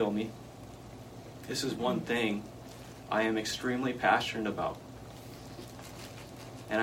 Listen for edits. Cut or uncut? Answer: uncut